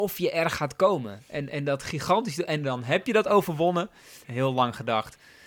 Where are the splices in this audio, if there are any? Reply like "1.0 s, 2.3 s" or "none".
4.2 s